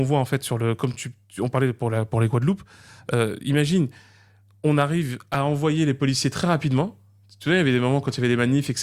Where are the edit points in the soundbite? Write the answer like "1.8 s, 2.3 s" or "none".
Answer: none